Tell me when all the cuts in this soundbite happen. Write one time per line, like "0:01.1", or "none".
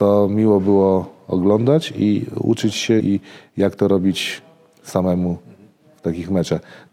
0:03.0

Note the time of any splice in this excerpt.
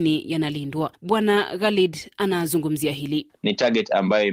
none

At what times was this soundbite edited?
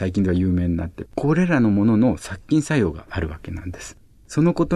0:01.1

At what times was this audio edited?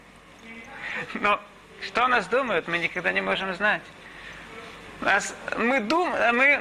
0:01.1

